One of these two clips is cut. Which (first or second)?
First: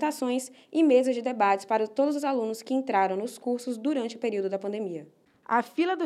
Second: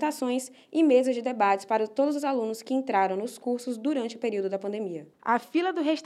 second